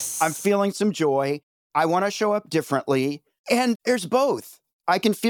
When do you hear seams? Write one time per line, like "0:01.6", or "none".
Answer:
none